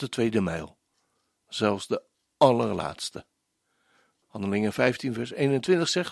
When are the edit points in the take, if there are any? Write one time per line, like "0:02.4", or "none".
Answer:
0:04.2

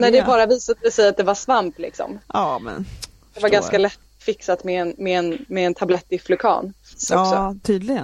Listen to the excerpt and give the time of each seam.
0:06.9

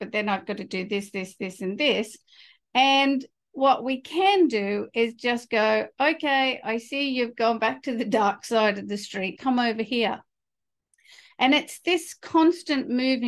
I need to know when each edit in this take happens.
0:09.3

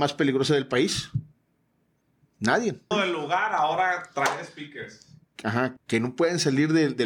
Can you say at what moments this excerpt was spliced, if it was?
0:02.9
0:05.8

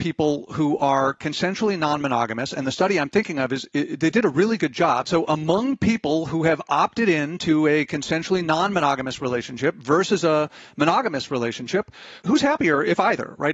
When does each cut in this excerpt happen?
0:05.0
0:12.2

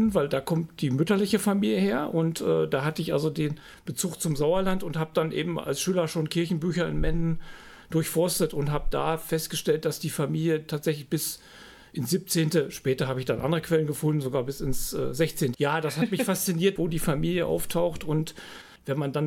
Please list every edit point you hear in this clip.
0:15.5
0:16.8

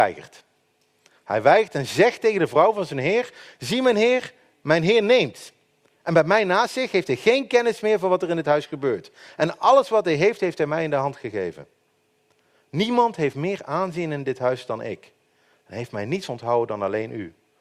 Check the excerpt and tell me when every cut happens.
none

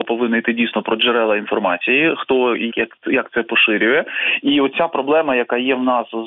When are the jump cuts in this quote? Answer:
0:02.7

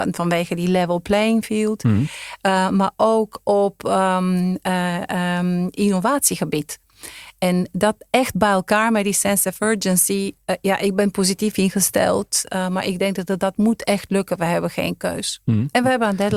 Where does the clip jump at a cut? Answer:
none

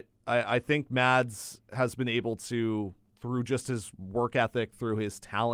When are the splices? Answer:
none

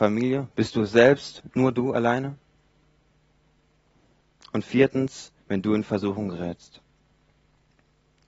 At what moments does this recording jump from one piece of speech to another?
0:05.4

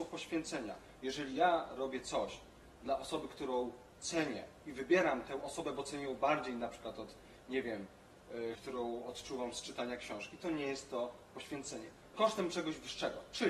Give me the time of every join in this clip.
0:08.6
0:12.1

